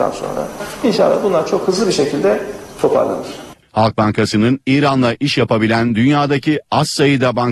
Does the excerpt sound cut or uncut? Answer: cut